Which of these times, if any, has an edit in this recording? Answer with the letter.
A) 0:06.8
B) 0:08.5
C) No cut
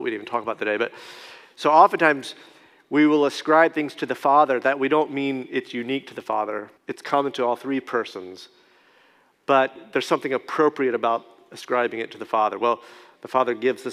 A